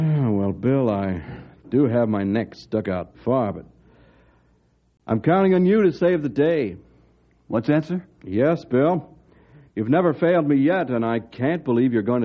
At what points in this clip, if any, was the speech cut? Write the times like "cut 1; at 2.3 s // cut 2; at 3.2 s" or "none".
cut 1; at 3.1 s